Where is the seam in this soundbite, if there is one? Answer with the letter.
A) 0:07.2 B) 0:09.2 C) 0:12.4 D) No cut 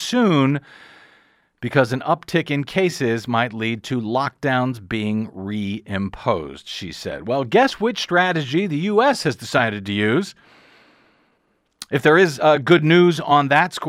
D